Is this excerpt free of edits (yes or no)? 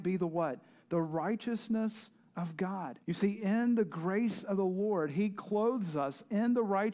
no